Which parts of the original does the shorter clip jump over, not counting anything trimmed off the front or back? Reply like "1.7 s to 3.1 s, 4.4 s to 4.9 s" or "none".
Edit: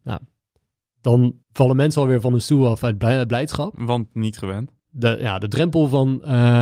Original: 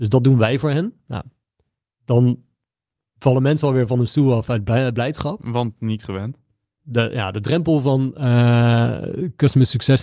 2.5 s to 3.1 s, 6.5 s to 6.7 s